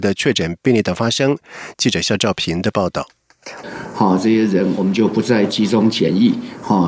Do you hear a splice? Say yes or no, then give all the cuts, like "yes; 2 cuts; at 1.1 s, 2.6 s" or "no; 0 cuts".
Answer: yes; 2 cuts; at 1.7 s, 3.6 s